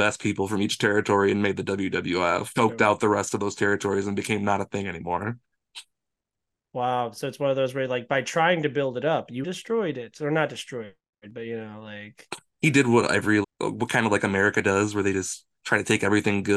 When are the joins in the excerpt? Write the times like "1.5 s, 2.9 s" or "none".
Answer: 2.6 s, 9.4 s, 13.4 s